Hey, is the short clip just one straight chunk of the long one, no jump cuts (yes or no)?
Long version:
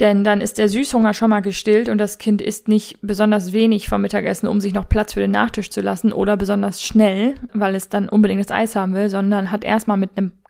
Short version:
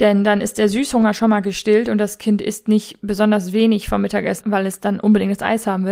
no